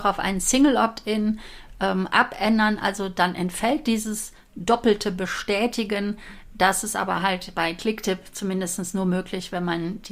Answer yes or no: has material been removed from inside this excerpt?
no